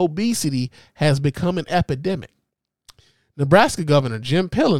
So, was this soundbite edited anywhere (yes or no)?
no